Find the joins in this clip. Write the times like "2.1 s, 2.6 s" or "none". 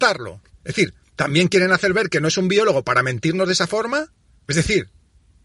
4.4 s